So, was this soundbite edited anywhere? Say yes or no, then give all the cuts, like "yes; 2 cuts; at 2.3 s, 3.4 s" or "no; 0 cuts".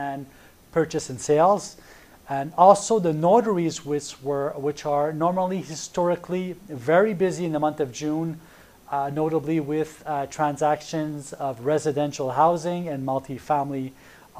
no; 0 cuts